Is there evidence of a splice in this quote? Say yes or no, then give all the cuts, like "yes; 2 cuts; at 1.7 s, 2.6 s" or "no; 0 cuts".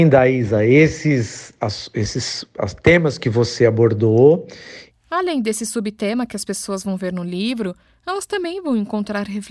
yes; 2 cuts; at 1.6 s, 4.9 s